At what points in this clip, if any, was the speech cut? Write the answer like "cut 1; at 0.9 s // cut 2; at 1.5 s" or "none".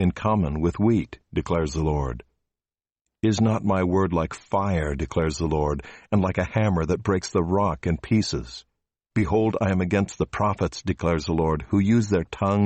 cut 1; at 9.1 s